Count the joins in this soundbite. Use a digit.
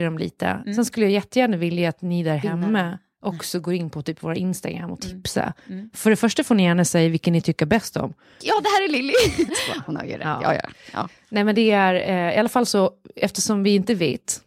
2